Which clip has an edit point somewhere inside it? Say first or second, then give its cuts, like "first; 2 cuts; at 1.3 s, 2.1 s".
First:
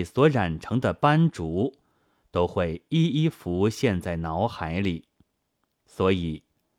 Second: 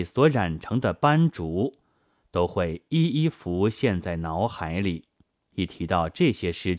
second; 1 cut; at 5.4 s